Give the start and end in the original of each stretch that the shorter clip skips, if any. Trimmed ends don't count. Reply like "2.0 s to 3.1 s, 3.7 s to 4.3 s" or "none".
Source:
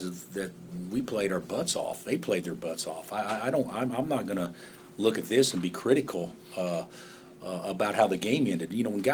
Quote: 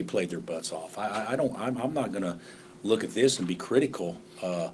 none